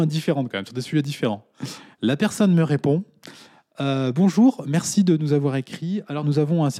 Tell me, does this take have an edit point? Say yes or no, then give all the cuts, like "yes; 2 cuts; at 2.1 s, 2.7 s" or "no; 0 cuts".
no; 0 cuts